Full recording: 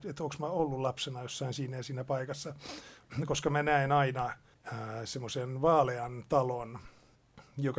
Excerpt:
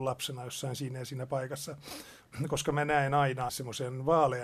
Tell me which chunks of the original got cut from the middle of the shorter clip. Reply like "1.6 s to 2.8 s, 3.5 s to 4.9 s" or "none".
4.3 s to 5.0 s